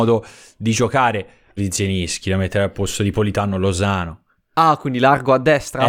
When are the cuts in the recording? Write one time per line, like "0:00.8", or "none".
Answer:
0:01.6